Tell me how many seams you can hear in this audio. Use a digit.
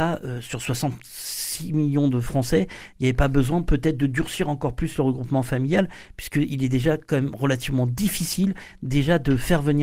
0